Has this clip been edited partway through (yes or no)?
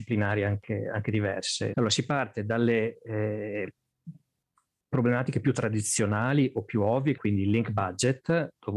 yes